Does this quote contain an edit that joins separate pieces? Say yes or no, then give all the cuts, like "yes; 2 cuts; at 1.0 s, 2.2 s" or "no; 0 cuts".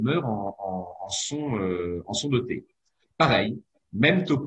yes; 1 cut; at 3.0 s